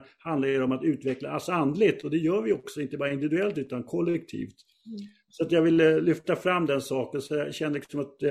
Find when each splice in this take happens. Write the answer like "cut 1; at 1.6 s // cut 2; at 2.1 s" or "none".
none